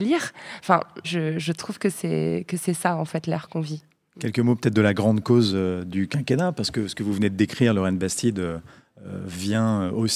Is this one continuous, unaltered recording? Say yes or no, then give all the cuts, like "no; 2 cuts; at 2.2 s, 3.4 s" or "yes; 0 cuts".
no; 1 cut; at 1.0 s